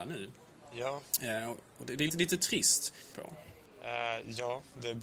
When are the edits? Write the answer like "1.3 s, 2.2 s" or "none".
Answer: 2.1 s, 3.1 s